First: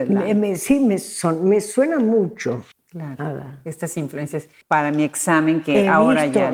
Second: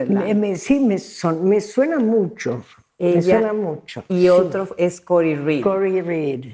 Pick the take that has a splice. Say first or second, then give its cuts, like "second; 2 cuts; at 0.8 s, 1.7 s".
first; 2 cuts; at 2.7 s, 4.6 s